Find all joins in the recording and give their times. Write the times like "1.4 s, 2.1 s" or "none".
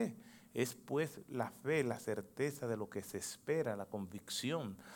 none